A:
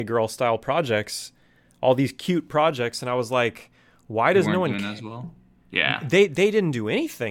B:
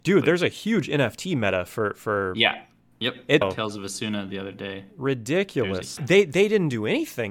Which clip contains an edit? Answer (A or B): B